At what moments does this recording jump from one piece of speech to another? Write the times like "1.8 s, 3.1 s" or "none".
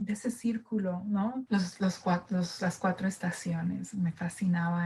1.5 s

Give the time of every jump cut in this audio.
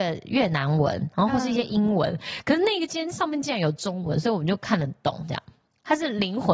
none

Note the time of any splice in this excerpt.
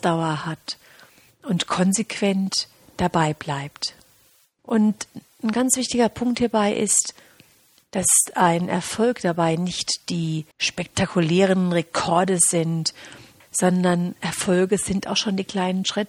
4.6 s, 10.5 s, 13.4 s

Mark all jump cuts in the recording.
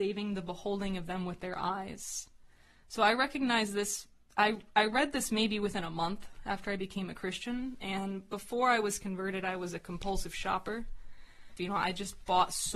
11.6 s

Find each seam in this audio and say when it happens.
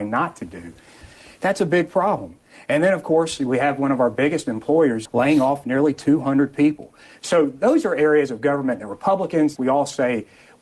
5.1 s, 9.6 s

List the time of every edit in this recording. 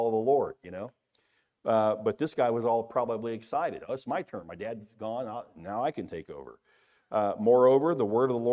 none

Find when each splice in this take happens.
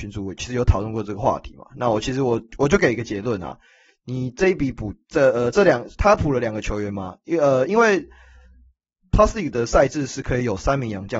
none

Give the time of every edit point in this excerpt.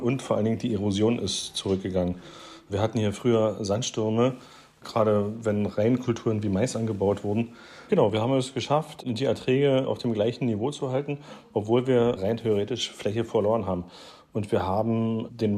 7.9 s

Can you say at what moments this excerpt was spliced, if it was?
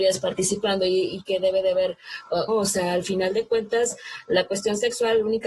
2.5 s

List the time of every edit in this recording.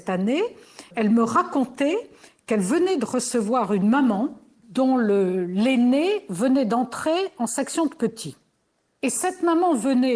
0.9 s, 4.6 s

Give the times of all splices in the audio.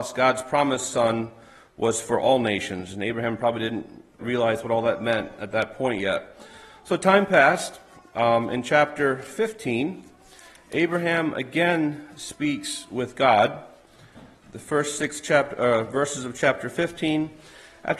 4.2 s

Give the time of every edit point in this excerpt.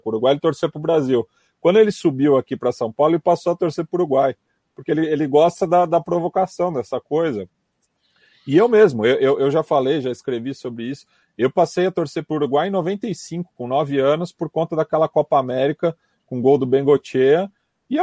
none

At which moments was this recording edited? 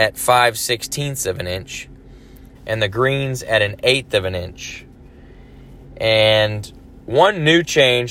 2.6 s

